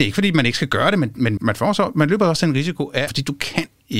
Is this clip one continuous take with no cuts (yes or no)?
no